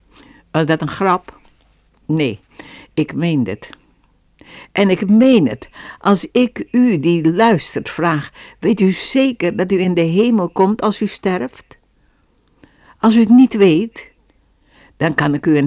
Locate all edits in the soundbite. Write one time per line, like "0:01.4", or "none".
none